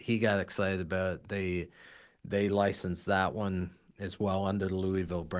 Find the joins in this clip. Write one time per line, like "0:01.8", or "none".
none

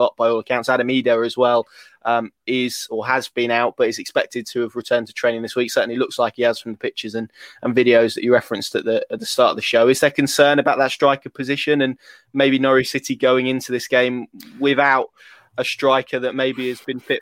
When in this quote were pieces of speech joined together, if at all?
none

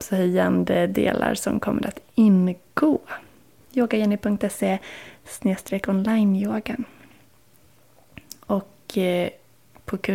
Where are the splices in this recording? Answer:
0:03.7

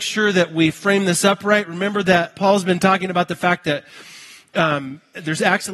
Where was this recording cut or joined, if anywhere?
0:02.3

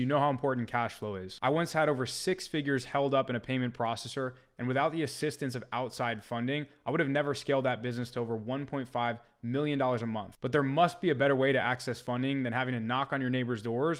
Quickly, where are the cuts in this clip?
none

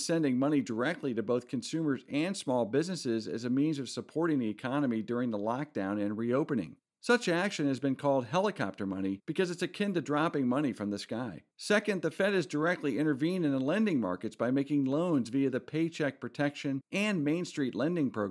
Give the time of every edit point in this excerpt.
0:11.5

